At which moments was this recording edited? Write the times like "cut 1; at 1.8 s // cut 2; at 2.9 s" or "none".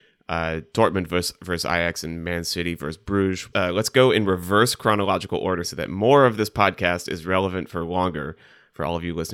cut 1; at 3.5 s // cut 2; at 5.6 s